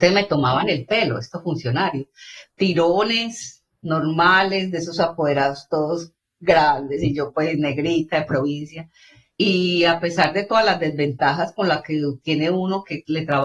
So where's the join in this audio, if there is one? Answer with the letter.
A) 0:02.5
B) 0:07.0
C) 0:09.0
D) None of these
D